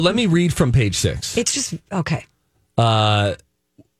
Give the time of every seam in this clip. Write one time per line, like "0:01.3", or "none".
none